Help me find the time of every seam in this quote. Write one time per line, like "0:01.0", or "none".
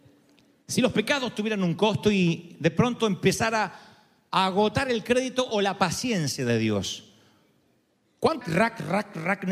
0:08.4